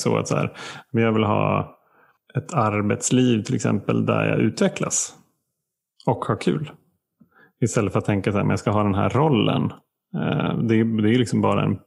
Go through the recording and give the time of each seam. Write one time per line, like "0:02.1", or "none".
none